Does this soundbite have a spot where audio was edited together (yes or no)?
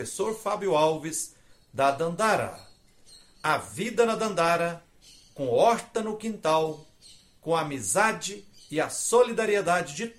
no